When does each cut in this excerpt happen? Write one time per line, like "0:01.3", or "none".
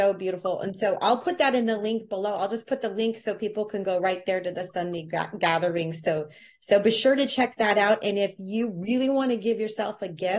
none